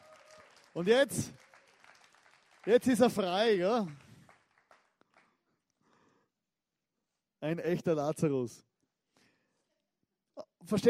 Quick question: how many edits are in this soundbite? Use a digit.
0